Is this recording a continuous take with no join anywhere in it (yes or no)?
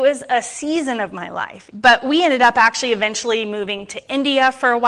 no